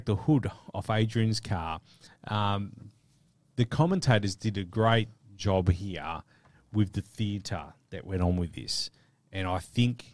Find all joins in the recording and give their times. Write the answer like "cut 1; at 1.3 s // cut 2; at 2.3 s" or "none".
cut 1; at 2.1 s